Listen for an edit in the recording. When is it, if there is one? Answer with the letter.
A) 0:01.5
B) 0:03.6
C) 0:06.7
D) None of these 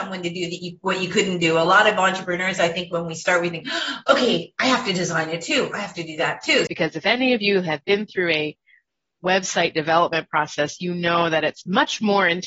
C